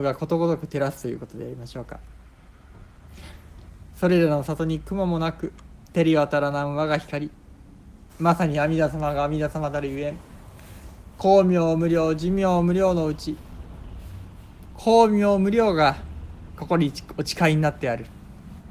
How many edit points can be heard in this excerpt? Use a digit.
2